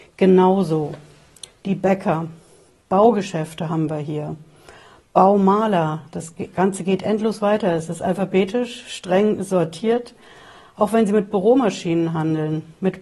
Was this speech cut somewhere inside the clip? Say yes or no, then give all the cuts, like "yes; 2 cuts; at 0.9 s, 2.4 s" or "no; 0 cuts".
no; 0 cuts